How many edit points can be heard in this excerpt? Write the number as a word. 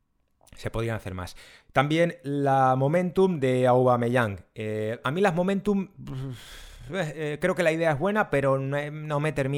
one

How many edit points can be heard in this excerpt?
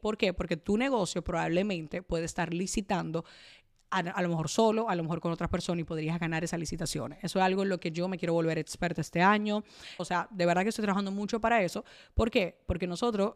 one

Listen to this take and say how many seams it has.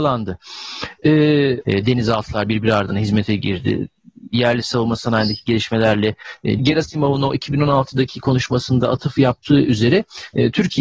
two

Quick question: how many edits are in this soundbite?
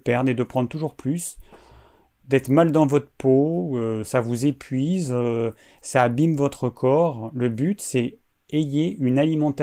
zero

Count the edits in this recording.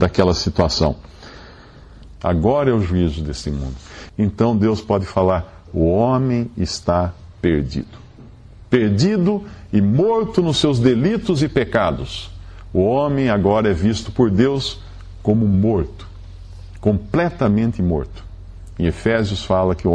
two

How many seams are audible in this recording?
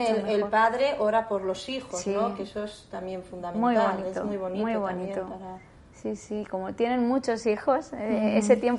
zero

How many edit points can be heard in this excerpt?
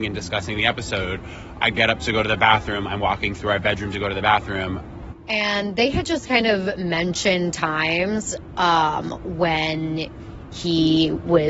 one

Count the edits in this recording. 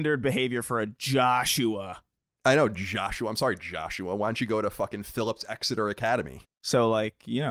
one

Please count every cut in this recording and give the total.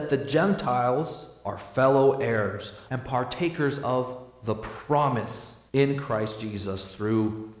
two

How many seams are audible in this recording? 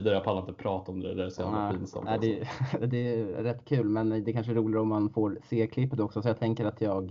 zero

